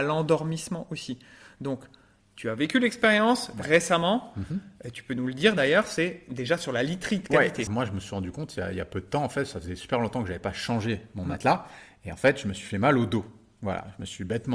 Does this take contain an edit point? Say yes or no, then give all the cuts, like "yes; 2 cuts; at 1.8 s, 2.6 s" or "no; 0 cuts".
yes; 1 cut; at 7.7 s